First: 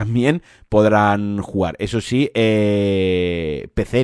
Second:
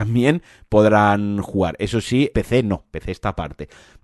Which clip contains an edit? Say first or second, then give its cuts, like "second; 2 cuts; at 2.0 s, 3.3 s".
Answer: second; 1 cut; at 2.3 s